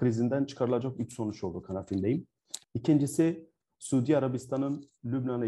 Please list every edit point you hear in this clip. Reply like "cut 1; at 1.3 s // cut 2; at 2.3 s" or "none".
cut 1; at 2.6 s